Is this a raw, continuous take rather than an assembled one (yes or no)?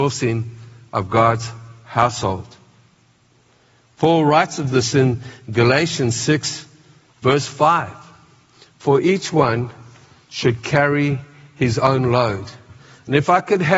yes